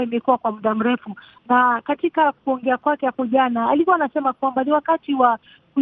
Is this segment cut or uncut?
uncut